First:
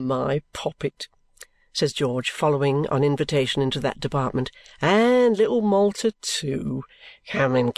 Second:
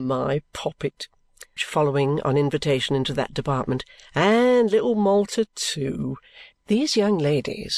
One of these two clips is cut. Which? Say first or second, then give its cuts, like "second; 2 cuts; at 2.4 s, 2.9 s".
second; 2 cuts; at 1.6 s, 6.5 s